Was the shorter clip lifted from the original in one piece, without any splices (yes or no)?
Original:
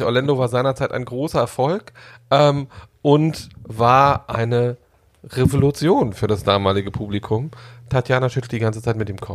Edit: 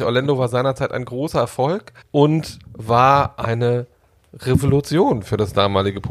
no